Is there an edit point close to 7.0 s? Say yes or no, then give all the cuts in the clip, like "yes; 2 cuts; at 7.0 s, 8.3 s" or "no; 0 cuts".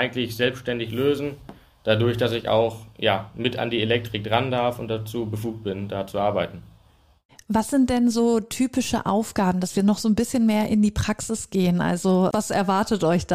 no; 0 cuts